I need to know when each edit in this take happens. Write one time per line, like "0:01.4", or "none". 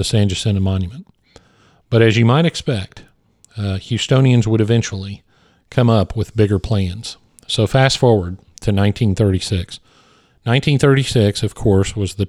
none